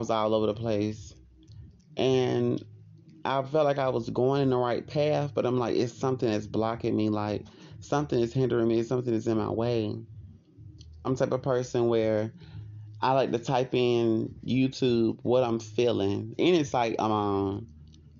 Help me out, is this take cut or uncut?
cut